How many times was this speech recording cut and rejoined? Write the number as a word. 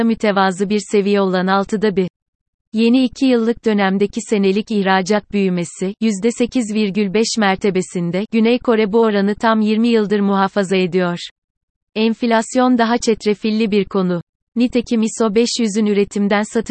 zero